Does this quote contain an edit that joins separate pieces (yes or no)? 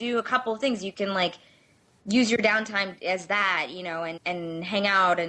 yes